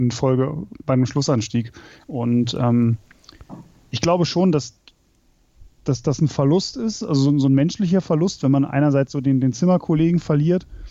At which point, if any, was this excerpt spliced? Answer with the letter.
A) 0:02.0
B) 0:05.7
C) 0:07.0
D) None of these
A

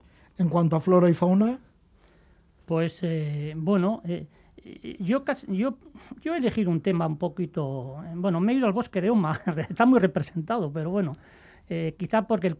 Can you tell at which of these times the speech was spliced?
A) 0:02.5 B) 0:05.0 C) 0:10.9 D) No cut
D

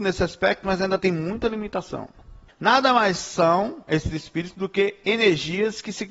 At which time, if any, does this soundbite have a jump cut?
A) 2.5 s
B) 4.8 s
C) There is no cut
A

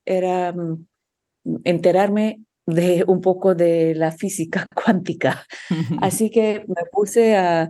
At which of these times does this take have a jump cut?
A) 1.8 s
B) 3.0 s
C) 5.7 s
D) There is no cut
D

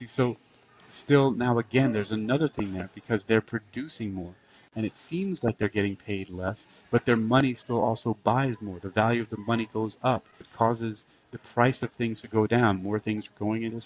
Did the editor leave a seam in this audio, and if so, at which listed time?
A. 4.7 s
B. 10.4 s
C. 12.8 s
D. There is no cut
B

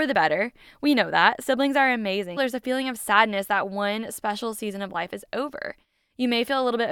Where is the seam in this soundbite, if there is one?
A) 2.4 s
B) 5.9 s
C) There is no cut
A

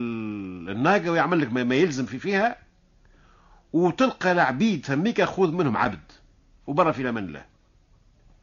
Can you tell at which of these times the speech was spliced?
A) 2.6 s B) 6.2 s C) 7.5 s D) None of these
D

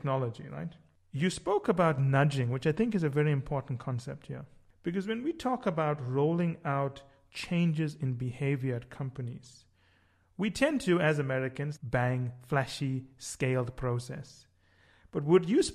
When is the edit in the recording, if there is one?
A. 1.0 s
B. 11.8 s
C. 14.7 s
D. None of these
B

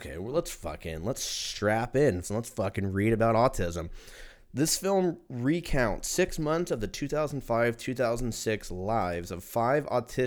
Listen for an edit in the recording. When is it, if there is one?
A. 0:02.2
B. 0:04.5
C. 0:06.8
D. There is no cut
A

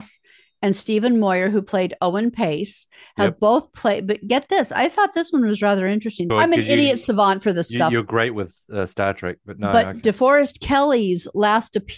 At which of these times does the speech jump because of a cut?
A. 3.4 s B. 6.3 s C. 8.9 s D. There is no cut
B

